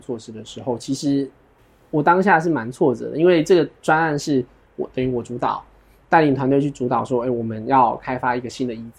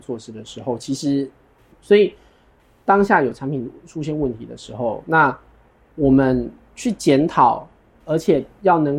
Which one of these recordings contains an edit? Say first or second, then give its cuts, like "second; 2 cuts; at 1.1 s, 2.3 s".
second; 1 cut; at 1.7 s